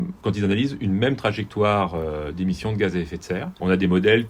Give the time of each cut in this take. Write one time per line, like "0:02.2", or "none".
none